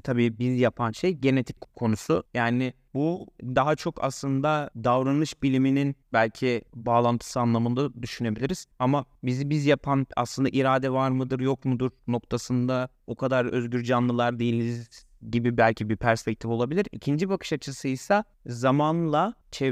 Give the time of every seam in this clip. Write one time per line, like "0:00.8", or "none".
0:02.3